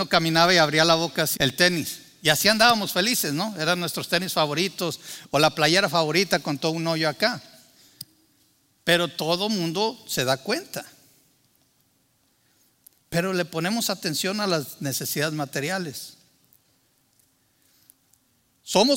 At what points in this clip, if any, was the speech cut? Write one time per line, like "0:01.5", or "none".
0:01.4